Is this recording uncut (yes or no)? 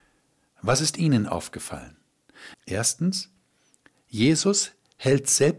no